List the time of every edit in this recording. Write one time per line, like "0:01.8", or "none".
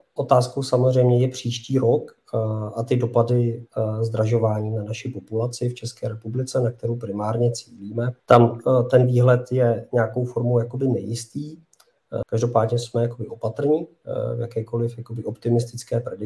0:08.2
0:12.2